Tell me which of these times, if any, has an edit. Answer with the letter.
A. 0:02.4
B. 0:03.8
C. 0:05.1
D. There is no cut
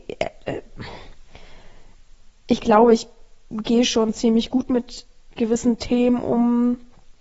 D